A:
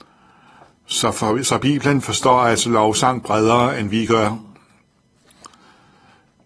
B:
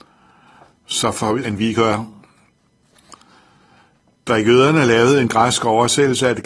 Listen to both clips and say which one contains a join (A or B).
B